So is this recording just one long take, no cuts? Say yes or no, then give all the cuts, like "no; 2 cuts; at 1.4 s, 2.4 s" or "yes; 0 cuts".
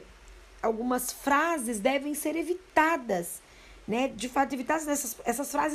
yes; 0 cuts